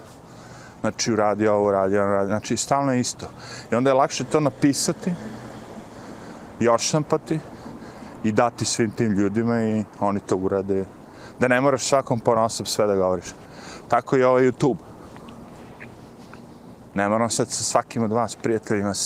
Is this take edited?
no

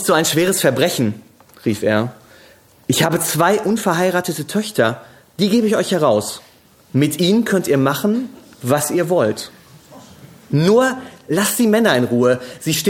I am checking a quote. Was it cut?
no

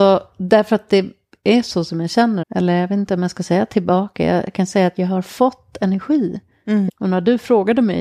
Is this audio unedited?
no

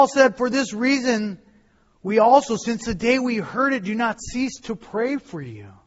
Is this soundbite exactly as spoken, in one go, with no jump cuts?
yes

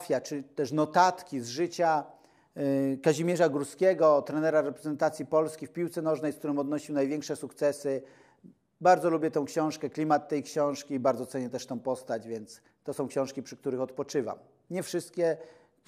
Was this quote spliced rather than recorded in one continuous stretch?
no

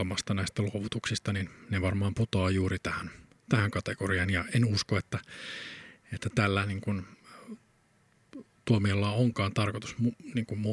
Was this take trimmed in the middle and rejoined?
yes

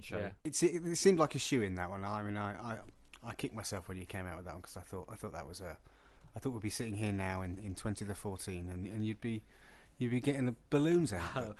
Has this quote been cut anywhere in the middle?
no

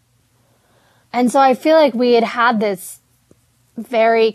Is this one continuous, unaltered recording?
no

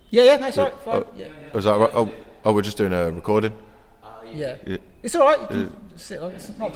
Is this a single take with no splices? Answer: yes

